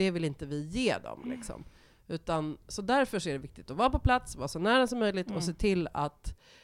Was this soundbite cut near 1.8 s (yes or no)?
no